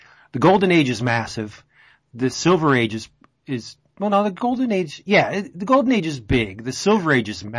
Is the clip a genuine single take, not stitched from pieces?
yes; 0 cuts

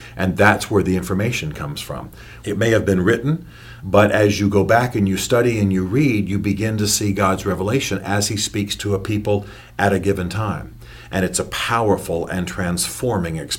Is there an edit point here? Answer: yes; 2 cuts; at 2.4 s, 3.8 s

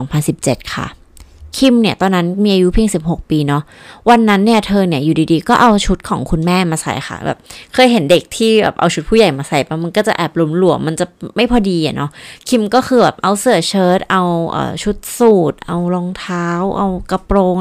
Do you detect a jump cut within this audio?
no; 0 cuts

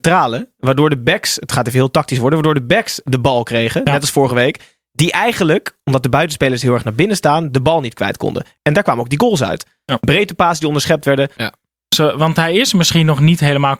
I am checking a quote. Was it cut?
yes; 2 cuts; at 8.6 s, 11.4 s

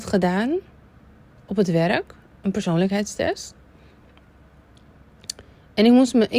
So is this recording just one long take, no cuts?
yes; 0 cuts

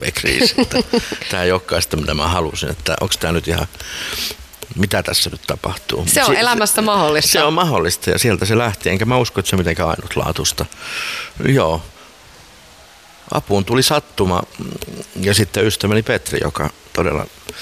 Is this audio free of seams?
yes; 0 cuts

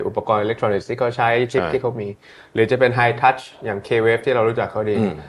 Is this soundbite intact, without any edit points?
yes; 0 cuts

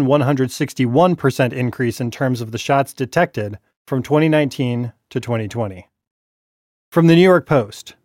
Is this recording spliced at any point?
no; 0 cuts

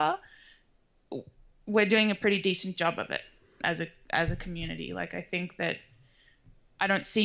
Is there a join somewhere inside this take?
no; 0 cuts

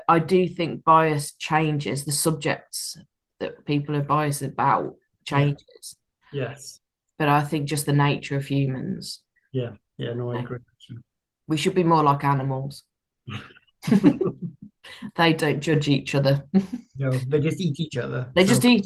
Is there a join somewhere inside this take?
no; 0 cuts

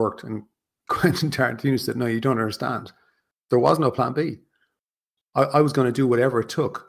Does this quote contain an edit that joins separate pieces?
no; 0 cuts

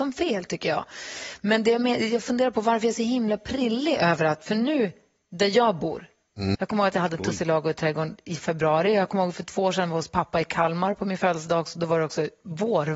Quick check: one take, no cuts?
no; 1 cut; at 6.5 s

